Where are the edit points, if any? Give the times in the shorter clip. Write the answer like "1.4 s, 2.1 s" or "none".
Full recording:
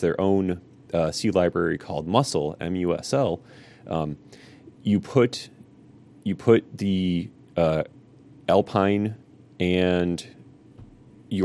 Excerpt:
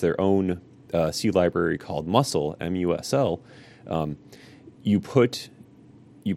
none